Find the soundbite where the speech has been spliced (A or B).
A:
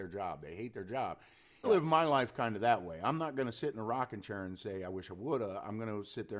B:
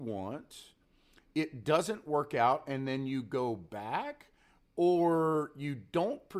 A